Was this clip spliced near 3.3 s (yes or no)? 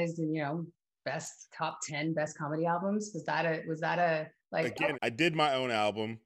no